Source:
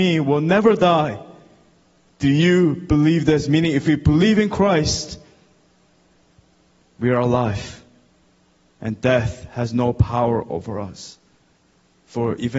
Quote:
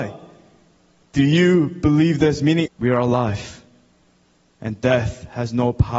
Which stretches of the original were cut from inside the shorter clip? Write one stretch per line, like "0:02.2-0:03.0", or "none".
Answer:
0:03.7-0:06.9